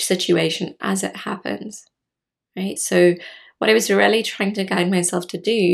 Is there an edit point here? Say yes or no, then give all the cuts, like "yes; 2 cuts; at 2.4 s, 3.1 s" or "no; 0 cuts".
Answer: no; 0 cuts